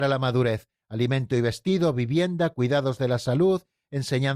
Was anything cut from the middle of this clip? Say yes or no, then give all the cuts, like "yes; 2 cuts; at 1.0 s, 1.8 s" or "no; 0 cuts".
no; 0 cuts